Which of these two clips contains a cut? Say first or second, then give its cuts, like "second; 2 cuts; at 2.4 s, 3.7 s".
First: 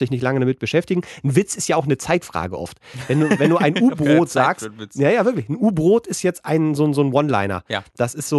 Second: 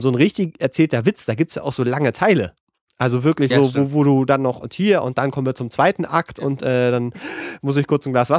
second; 1 cut; at 3.5 s